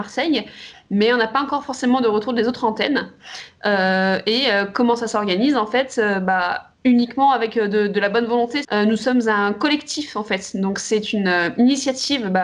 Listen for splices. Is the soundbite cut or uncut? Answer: cut